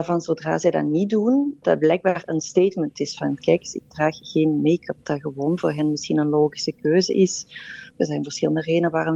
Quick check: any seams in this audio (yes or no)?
yes